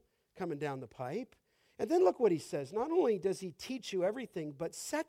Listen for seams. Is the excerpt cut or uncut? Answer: uncut